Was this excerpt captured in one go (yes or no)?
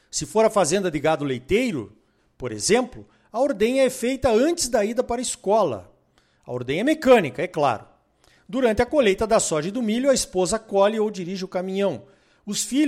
yes